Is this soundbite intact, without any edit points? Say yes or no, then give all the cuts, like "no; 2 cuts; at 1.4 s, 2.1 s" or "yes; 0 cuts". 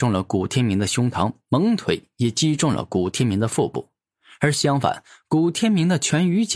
yes; 0 cuts